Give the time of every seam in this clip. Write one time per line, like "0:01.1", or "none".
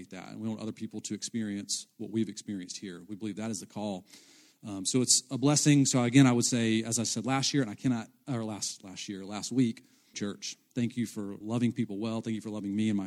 0:10.1
0:11.4